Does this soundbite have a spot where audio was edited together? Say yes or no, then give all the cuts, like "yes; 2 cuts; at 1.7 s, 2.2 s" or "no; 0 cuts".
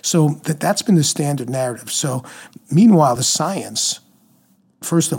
no; 0 cuts